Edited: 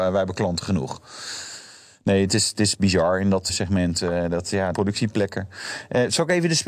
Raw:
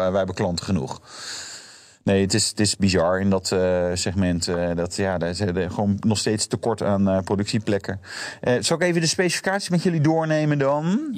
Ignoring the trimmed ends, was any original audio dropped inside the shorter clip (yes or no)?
yes